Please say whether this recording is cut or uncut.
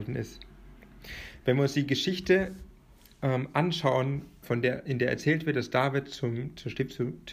cut